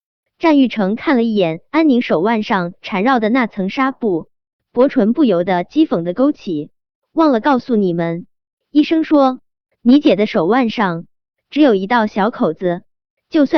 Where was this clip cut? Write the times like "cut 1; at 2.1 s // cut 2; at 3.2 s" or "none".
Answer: cut 1; at 8.6 s